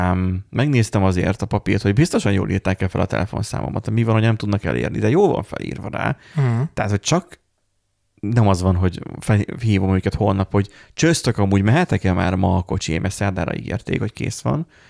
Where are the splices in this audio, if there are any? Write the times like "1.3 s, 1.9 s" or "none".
none